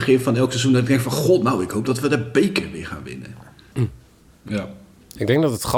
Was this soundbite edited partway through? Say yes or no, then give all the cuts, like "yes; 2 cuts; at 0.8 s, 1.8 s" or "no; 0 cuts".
yes; 1 cut; at 3.7 s